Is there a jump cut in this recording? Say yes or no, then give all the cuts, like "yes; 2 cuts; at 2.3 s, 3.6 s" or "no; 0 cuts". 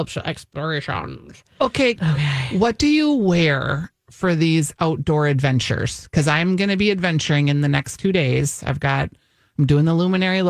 yes; 1 cut; at 2.0 s